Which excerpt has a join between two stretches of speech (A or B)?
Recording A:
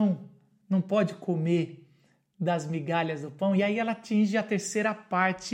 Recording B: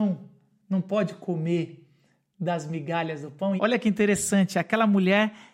B